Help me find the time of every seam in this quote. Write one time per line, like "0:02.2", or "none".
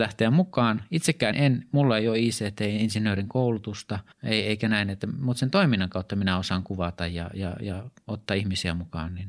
0:01.3
0:04.1